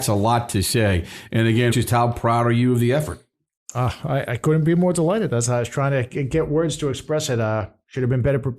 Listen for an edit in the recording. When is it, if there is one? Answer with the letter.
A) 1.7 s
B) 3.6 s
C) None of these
A